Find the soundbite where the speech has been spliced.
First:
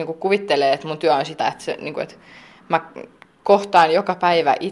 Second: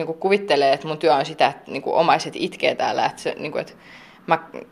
first; 1 cut; at 1.4 s

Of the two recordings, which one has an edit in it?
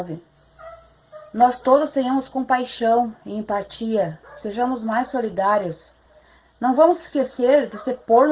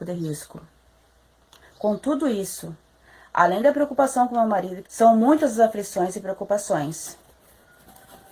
second; 2 cuts; at 1.6 s, 4.8 s

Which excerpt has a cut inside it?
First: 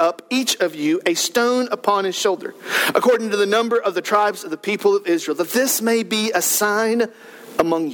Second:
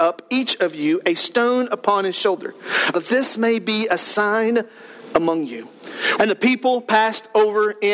second; 2 cuts; at 2.9 s, 6.2 s

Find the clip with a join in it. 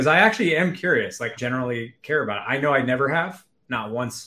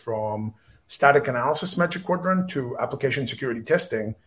first; 1 cut; at 1.4 s

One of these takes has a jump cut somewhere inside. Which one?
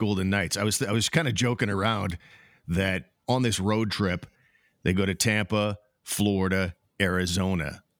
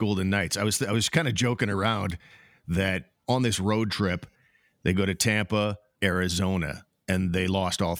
second; 1 cut; at 5.9 s

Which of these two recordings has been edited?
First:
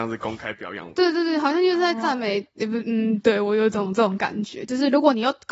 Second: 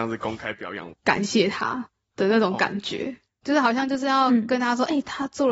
second; 2 cuts; at 0.9 s, 3.4 s

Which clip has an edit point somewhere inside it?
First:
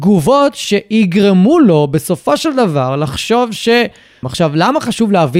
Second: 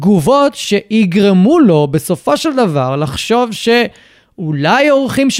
first; 1 cut; at 4.2 s

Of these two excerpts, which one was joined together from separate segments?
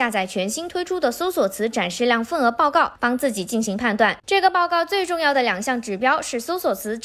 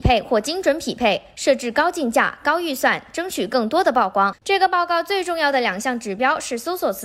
second; 1 cut; at 4.4 s

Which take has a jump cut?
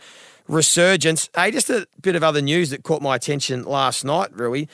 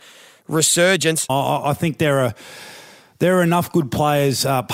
second; 1 cut; at 1.3 s

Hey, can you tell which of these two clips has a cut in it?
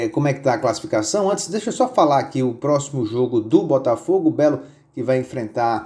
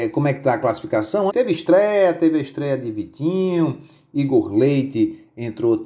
second; 1 cut; at 1.3 s

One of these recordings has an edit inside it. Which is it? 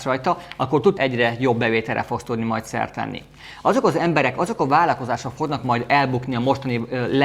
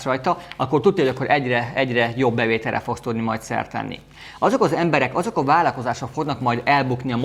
first; 1 cut; at 1.0 s

